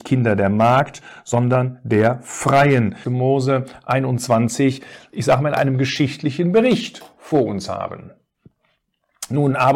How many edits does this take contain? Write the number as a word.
one